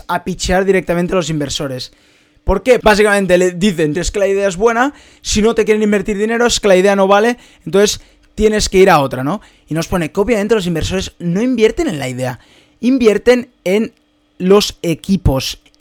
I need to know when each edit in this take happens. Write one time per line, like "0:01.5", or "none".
0:02.8
0:04.0